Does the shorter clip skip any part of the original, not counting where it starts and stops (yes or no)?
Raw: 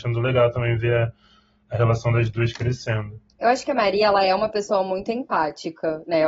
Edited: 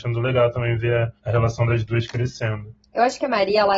yes